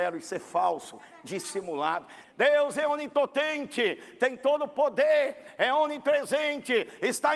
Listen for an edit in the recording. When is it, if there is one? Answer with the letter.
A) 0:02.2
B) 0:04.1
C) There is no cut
A